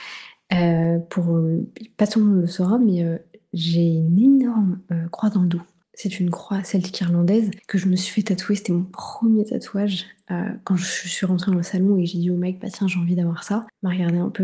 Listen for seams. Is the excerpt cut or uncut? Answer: uncut